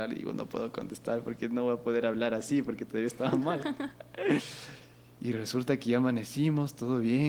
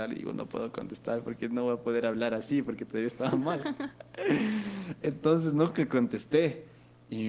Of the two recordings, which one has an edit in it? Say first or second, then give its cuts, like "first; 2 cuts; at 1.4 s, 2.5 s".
first; 1 cut; at 4.4 s